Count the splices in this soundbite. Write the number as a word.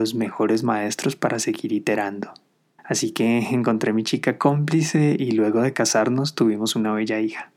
one